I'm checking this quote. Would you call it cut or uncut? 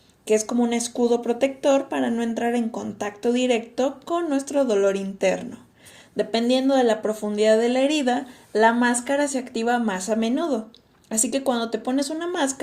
uncut